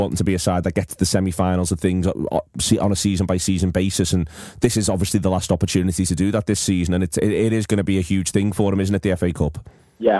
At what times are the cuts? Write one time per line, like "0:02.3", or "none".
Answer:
none